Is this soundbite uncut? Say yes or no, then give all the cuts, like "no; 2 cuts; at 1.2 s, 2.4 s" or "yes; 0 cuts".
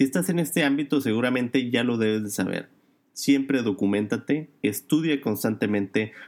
yes; 0 cuts